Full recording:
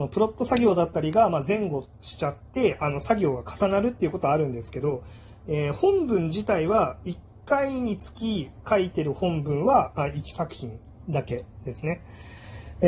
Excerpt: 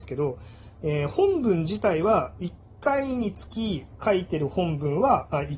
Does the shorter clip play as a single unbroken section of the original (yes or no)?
yes